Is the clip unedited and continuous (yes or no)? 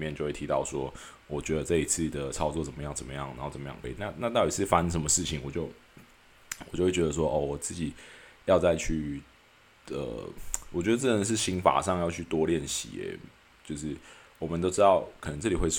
no